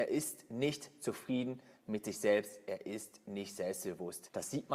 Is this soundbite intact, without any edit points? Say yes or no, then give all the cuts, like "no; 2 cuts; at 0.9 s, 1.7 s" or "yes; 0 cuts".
yes; 0 cuts